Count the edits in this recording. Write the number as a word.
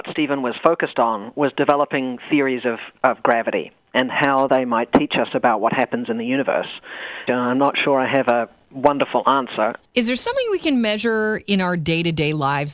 two